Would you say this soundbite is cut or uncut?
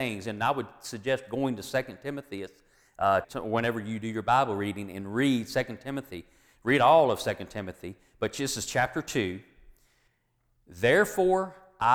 cut